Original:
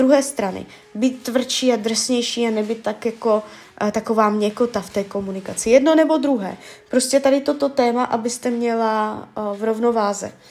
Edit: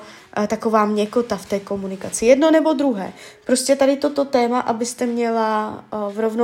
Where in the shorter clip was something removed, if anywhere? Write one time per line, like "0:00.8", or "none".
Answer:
none